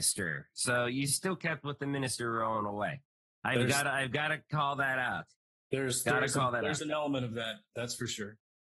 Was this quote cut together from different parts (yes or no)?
no